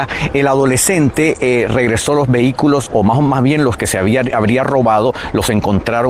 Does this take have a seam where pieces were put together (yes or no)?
no